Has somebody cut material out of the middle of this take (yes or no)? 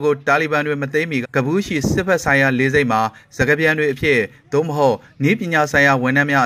yes